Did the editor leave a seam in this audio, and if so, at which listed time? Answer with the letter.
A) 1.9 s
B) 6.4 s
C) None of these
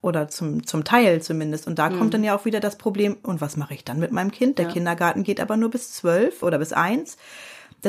B